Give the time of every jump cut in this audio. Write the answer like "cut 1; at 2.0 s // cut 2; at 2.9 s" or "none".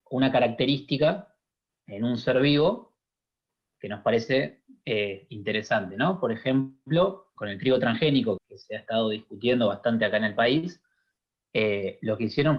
cut 1; at 7.4 s // cut 2; at 8.4 s